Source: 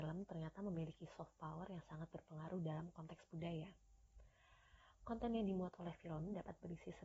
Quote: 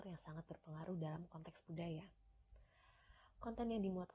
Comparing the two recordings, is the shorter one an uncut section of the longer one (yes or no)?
yes